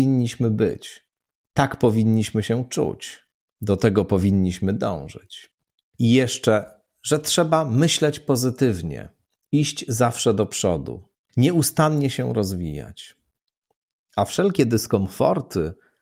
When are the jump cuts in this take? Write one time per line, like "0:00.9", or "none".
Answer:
none